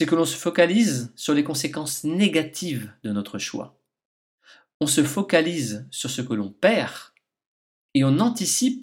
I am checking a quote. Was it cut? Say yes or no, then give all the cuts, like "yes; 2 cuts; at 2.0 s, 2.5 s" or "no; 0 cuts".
no; 0 cuts